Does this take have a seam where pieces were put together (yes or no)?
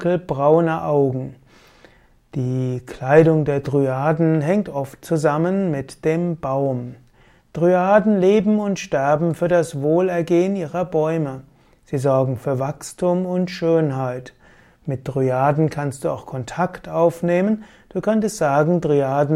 no